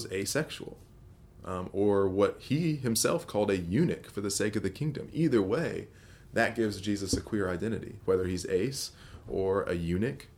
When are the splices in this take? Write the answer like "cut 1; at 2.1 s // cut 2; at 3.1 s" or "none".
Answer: none